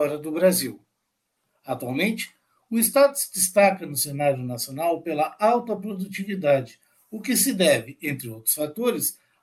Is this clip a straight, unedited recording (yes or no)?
no